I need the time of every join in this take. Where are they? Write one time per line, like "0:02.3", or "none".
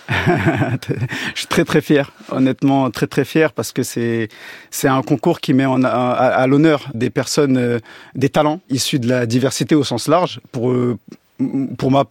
0:06.9
0:08.7